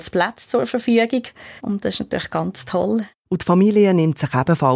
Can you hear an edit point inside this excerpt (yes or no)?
yes